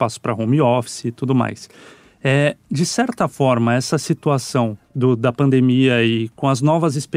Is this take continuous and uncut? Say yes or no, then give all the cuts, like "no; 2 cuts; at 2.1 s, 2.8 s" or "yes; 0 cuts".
yes; 0 cuts